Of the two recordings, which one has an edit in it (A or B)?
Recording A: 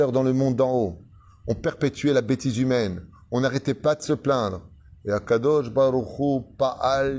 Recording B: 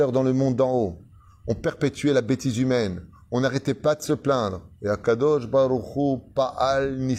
B